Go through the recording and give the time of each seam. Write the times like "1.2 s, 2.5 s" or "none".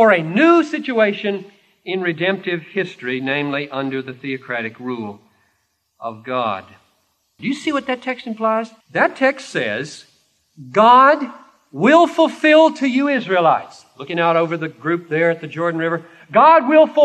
7.4 s, 8.8 s